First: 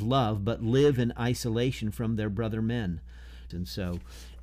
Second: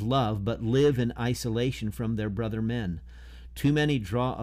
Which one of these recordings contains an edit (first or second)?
first